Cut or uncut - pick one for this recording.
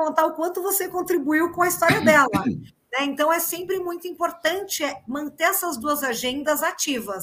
uncut